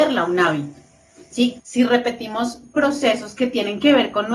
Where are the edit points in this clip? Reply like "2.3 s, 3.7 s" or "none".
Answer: 1.6 s